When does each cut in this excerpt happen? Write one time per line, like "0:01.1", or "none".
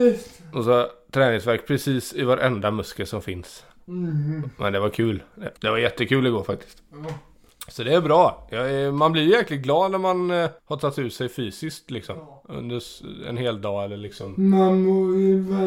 0:05.6
0:10.6